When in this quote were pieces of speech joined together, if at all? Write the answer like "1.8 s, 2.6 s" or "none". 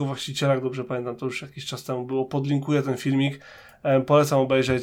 none

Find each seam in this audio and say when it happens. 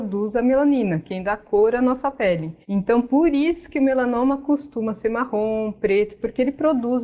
2.6 s

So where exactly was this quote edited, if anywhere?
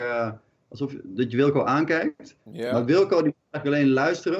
none

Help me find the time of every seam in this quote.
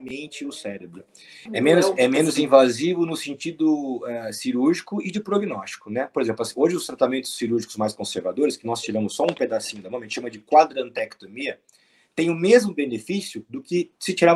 1.5 s

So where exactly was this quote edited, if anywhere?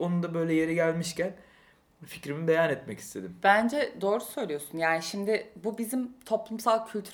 none

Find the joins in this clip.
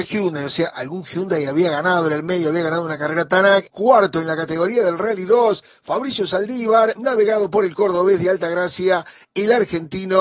3.7 s, 7.0 s

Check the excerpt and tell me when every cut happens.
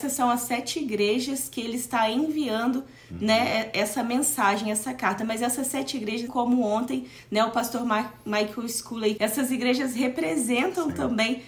6.3 s, 9.2 s

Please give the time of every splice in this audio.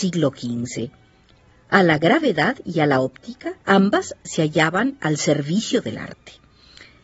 3.6 s

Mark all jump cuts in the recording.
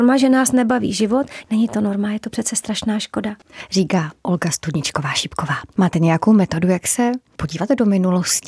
1.4 s

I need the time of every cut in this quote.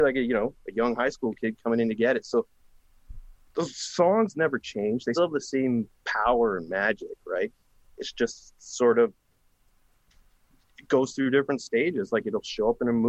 5.1 s

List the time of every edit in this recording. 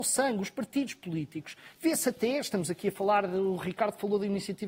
none

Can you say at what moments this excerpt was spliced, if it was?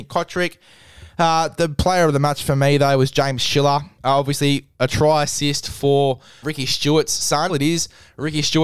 4.0 s, 6.4 s, 7.5 s

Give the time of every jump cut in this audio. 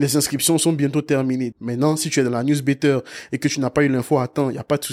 1.5 s

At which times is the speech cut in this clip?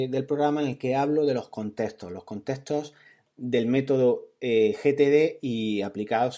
none

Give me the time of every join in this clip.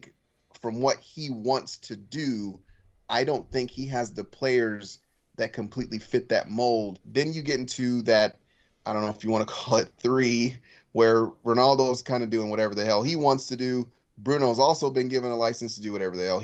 7.0 s

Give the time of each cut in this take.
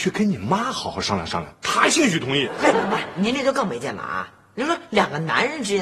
2.7 s

